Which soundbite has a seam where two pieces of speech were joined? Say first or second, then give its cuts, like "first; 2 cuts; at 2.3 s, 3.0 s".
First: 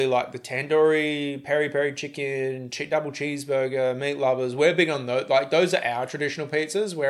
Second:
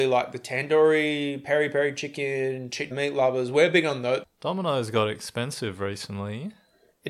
second; 2 cuts; at 2.9 s, 4.2 s